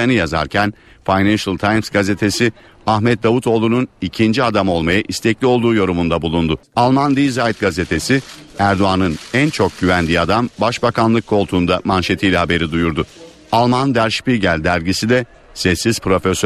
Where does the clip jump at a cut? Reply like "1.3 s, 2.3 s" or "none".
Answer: 6.6 s